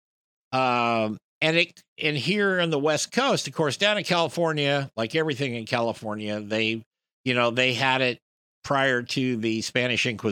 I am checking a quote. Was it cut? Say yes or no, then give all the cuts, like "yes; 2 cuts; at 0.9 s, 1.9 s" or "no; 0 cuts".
no; 0 cuts